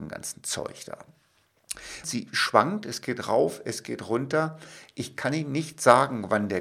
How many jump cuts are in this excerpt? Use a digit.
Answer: 1